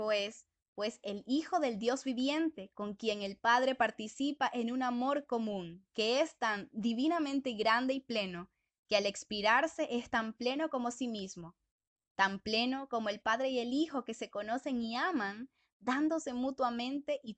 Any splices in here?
no; 0 cuts

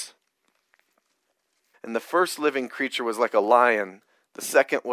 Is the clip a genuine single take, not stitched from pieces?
no; 1 cut; at 1.7 s

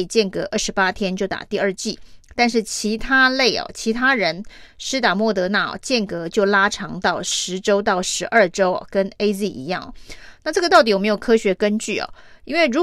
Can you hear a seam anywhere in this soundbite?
no; 0 cuts

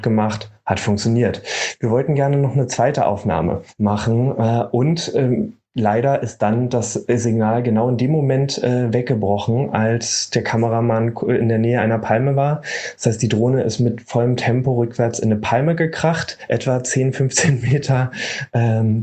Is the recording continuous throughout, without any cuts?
yes; 0 cuts

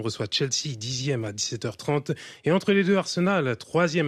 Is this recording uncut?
yes; 0 cuts

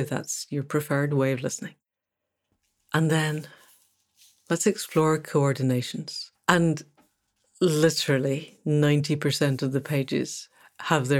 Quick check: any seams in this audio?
yes; 1 cut; at 6.4 s

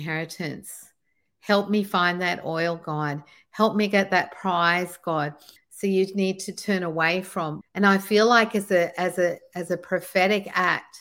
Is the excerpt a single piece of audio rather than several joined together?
no; 2 cuts; at 5.6 s, 7.6 s

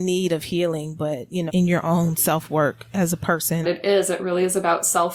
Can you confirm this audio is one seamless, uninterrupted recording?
no; 2 cuts; at 1.5 s, 3.6 s

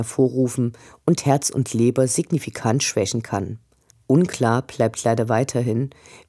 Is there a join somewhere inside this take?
no; 0 cuts

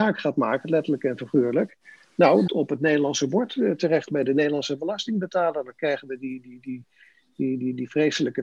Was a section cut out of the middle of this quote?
yes; 1 cut; at 2.5 s

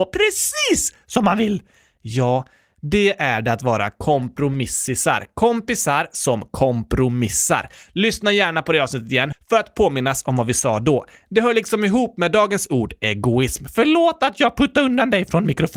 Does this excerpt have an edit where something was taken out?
yes; 1 cut; at 9.3 s

